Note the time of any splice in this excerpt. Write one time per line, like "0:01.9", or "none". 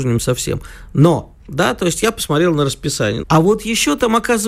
0:01.4
0:03.2

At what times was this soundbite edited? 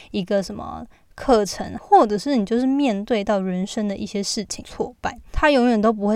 0:01.8
0:04.6

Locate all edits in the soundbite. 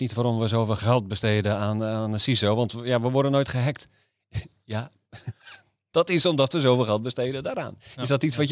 none

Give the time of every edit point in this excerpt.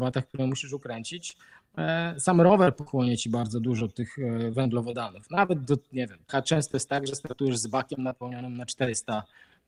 0:06.3

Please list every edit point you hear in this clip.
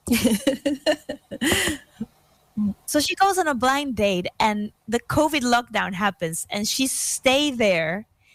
0:02.8

